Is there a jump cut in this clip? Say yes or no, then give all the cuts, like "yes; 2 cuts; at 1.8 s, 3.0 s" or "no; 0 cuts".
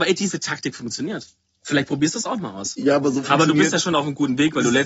yes; 1 cut; at 3.0 s